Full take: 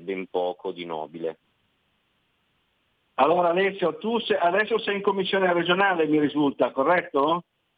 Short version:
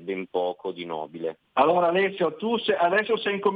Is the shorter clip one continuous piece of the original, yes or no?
no